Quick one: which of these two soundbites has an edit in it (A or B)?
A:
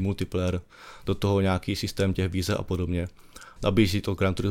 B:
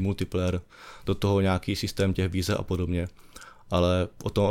A